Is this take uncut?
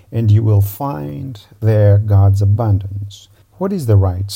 no; 1 cut; at 3.4 s

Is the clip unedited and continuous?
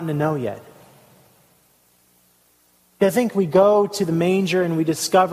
yes; 0 cuts

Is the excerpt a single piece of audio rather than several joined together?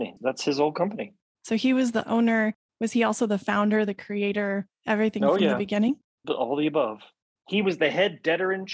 yes; 0 cuts

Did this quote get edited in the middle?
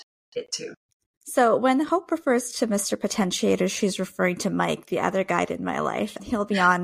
no; 0 cuts

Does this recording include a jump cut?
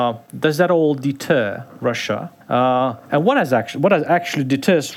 yes; 1 cut; at 2.4 s

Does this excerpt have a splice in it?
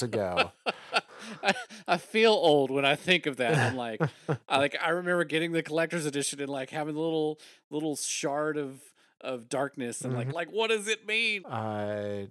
yes; 2 cuts; at 10.3 s, 11.4 s

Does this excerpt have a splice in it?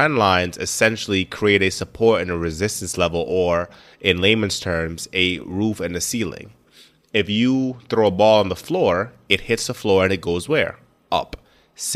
no; 0 cuts

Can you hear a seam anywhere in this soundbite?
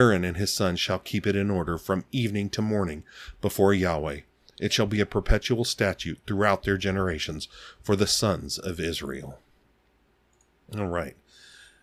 no; 0 cuts

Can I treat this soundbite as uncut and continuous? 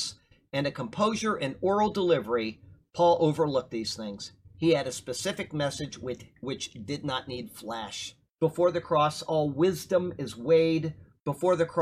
no; 1 cut; at 8.3 s

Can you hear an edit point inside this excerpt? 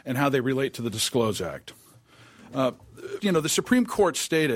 yes; 1 cut; at 3.2 s

